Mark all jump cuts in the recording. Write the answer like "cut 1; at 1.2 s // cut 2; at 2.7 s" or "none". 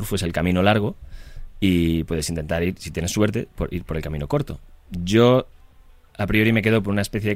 none